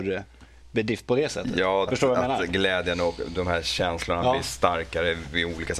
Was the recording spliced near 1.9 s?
yes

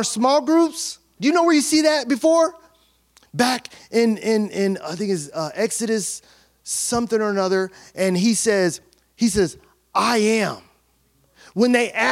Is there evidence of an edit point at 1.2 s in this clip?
yes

